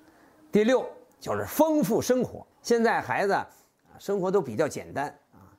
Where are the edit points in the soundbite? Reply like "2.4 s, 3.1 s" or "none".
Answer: 2.5 s